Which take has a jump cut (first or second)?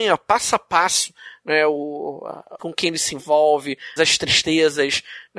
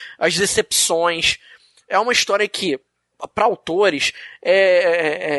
first